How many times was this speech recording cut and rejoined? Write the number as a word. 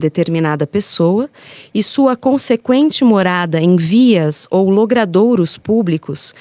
zero